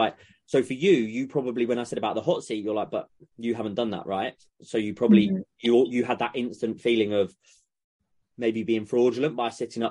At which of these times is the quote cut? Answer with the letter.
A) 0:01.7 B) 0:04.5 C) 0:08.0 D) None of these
D